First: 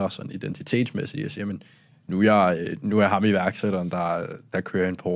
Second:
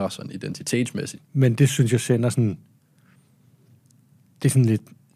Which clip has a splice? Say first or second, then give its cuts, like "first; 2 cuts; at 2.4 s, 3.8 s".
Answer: second; 1 cut; at 1.1 s